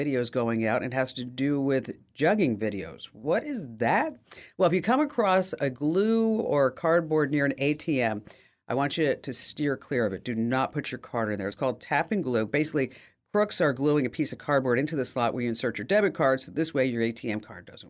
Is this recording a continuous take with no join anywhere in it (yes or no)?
yes